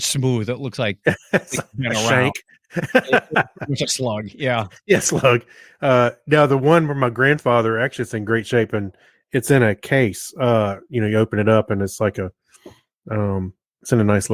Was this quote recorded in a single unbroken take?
yes; 0 cuts

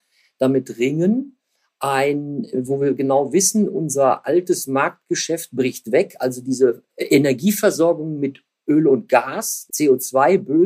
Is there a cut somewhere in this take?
yes; 2 cuts; at 6.9 s, 9.7 s

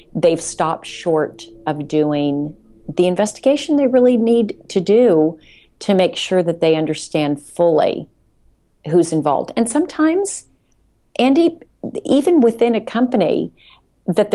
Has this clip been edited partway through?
no; 0 cuts

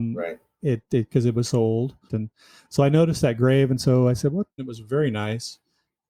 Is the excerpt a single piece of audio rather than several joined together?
no; 2 cuts; at 2.1 s, 4.6 s

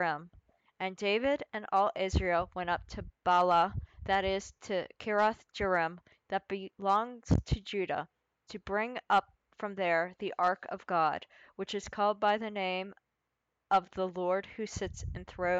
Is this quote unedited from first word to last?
yes; 0 cuts

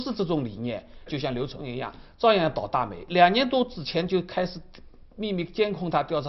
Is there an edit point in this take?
yes; 1 cut; at 1.1 s

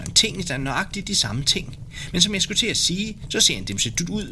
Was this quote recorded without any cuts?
yes; 0 cuts

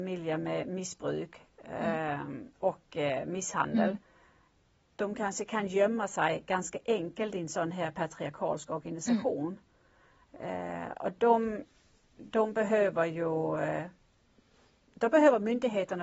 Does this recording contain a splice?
no; 0 cuts

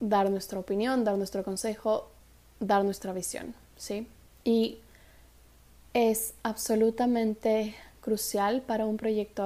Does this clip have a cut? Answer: no; 0 cuts

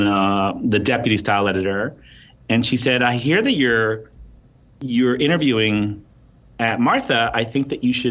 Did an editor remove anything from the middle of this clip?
no; 0 cuts

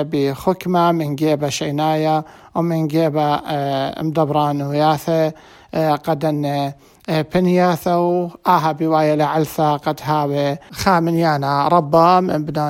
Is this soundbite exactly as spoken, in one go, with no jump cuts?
yes; 0 cuts

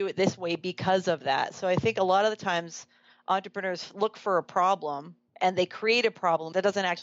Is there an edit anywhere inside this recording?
no; 0 cuts

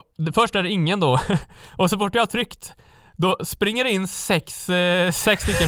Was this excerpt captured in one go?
yes; 0 cuts

